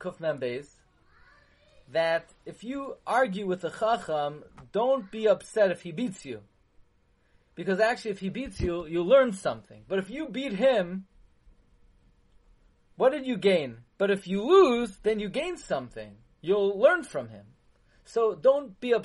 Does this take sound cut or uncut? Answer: cut